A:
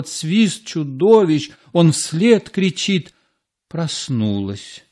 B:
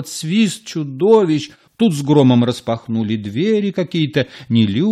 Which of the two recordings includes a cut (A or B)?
B